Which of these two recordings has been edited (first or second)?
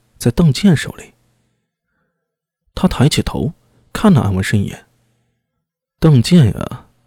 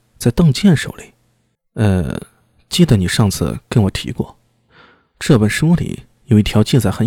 second